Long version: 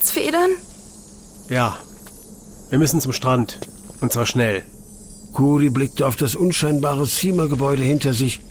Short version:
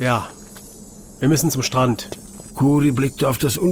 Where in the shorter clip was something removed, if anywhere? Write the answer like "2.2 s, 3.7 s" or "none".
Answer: 2.5 s